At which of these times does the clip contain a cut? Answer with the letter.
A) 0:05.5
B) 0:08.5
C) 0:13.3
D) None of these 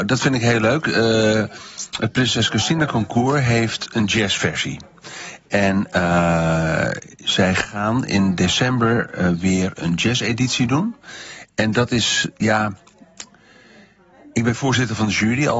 D